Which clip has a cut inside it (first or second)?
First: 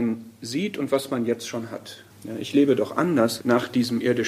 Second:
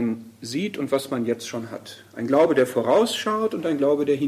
first